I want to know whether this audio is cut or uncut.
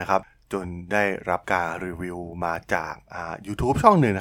uncut